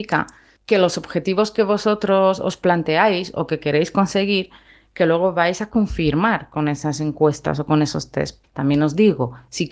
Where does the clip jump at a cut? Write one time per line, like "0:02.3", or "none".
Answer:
0:08.4